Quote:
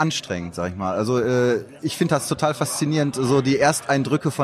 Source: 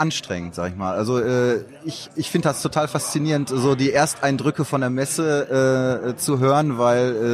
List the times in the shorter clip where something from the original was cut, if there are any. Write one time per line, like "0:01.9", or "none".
0:01.8